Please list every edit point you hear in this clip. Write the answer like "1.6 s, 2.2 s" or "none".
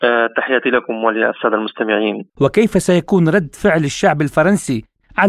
2.3 s